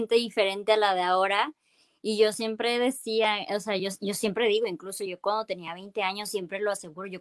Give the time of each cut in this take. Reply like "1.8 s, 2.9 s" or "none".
none